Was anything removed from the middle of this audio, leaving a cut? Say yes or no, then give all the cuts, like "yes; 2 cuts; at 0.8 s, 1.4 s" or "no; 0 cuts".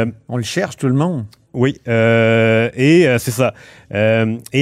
no; 0 cuts